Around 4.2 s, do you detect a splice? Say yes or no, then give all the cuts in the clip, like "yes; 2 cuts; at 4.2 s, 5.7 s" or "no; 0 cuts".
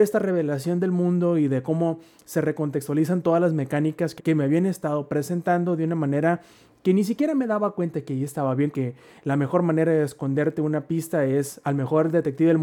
yes; 2 cuts; at 4.2 s, 8.7 s